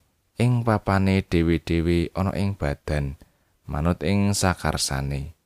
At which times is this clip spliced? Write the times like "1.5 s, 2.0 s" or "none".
none